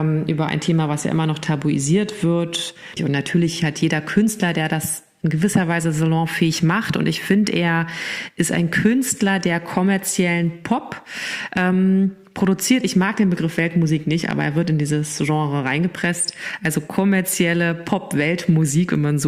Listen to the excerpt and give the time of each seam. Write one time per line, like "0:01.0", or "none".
0:03.0